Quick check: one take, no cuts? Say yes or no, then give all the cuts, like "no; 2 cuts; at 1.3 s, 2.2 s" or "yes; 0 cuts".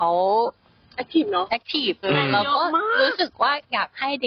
no; 1 cut; at 2.0 s